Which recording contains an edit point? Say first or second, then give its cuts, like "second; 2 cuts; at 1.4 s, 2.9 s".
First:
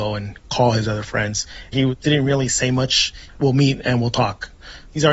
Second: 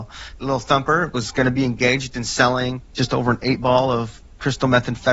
first; 2 cuts; at 1.7 s, 3.3 s